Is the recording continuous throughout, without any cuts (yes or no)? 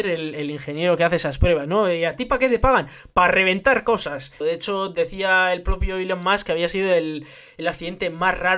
no